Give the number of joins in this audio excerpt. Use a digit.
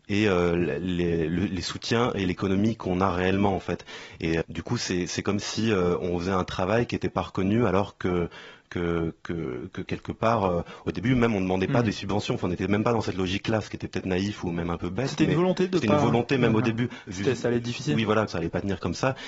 3